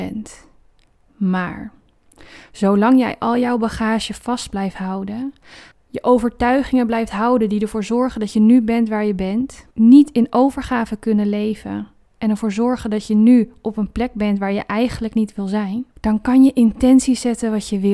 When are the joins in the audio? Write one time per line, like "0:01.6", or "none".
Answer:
0:05.7
0:09.7
0:15.9